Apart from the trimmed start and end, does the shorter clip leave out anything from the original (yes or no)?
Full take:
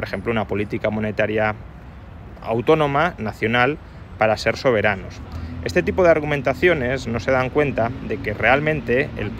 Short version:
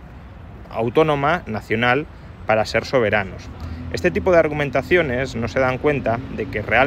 no